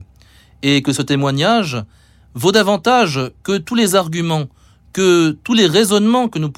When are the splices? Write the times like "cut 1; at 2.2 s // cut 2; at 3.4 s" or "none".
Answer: none